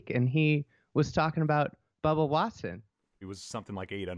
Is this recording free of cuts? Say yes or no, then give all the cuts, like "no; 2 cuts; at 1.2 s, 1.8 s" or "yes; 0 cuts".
no; 1 cut; at 3.2 s